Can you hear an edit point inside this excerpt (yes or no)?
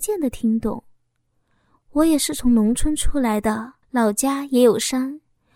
yes